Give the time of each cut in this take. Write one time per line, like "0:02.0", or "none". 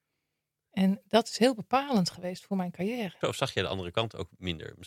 0:03.2